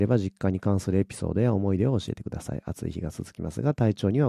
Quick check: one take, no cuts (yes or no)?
yes